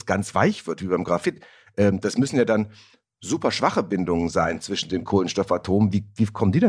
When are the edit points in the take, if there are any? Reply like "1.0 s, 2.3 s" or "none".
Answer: none